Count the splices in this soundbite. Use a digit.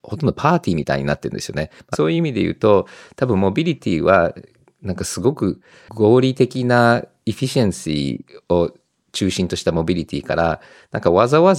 1